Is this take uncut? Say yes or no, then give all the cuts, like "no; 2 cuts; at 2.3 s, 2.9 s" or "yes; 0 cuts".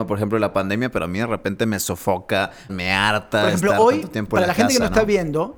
no; 1 cut; at 2.7 s